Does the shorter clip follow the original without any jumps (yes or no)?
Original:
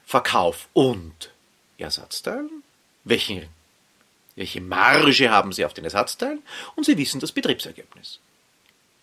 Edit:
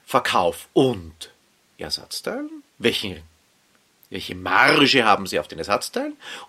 no